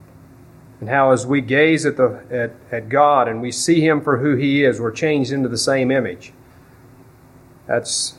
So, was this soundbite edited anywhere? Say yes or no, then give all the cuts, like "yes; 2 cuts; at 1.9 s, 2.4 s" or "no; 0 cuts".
no; 0 cuts